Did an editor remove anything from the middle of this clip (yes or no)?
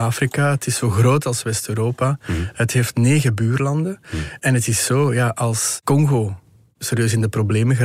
yes